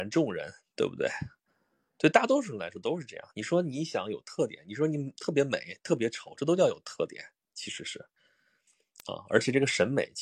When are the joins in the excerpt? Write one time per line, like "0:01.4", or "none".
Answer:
none